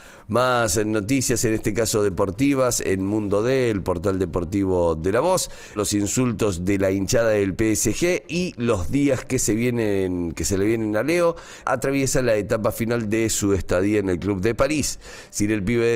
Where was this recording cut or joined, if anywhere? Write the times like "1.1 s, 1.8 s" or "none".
5.8 s, 11.6 s

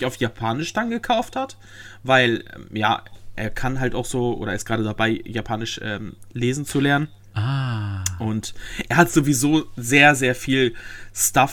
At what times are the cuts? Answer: none

